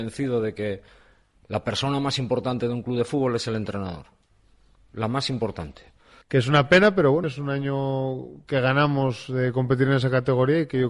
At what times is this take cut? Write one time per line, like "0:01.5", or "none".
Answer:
0:06.2
0:07.2